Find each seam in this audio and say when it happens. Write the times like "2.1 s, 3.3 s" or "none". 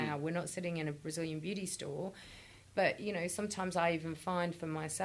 none